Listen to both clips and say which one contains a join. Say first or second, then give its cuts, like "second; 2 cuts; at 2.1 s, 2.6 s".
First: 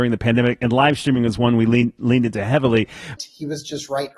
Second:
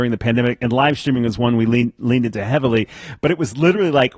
first; 1 cut; at 3.2 s